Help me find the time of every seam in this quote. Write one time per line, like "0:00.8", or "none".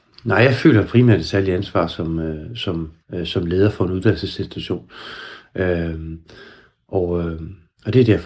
0:03.0